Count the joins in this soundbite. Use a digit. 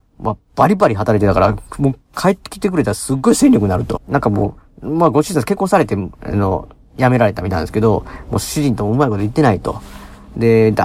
1